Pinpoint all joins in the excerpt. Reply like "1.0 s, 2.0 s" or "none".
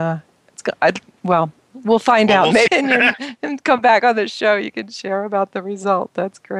2.7 s